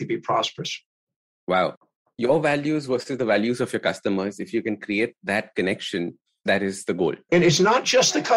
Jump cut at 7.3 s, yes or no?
yes